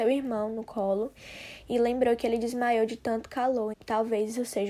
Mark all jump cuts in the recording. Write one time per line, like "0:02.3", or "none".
0:03.7